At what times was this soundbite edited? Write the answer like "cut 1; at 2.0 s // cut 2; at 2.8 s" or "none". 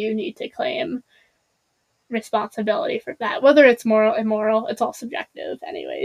none